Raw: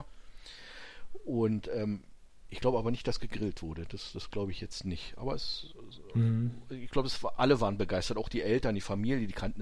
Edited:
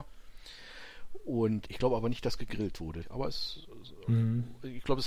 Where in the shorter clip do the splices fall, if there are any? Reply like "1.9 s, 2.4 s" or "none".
1.7 s, 3.0 s